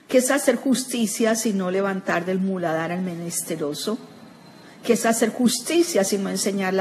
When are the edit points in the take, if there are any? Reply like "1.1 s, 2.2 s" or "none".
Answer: none